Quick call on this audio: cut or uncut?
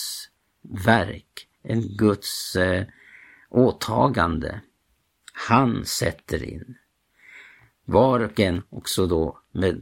uncut